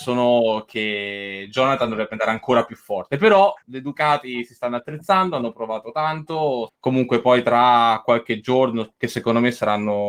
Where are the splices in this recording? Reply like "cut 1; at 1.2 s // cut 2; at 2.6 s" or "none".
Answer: cut 1; at 3.6 s // cut 2; at 6.7 s // cut 3; at 8.9 s